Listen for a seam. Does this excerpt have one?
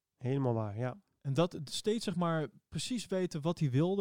no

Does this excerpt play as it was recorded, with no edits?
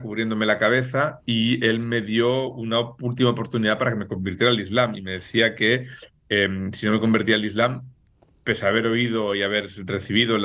yes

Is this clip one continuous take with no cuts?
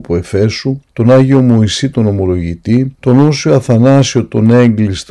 no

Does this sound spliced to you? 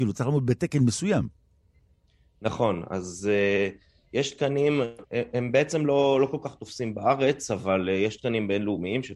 no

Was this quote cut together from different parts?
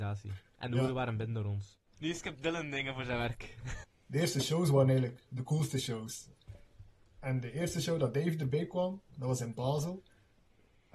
yes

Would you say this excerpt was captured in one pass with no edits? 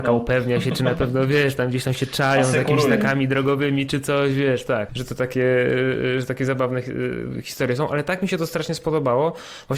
no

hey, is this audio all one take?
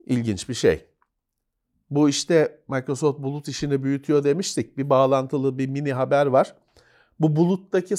yes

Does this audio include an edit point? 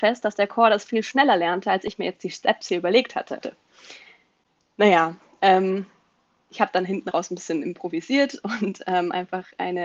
yes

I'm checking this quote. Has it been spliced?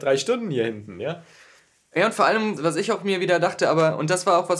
yes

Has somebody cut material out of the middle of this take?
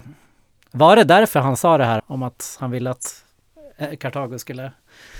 yes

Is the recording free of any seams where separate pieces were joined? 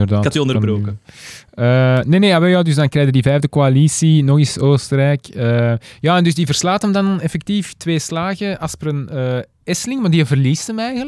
yes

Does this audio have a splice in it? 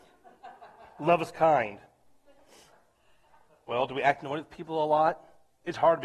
no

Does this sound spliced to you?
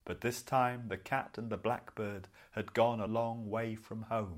yes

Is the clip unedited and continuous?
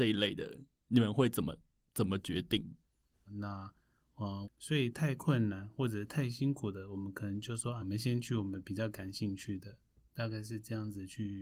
no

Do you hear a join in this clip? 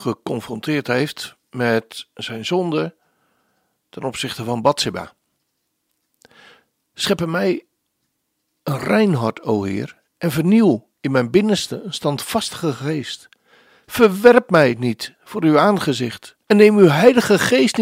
yes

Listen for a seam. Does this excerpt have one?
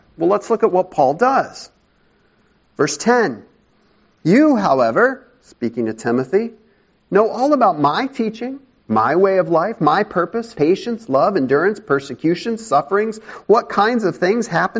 yes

